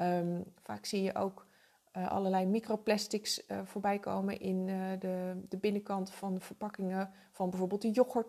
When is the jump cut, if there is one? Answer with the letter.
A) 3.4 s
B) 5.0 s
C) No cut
C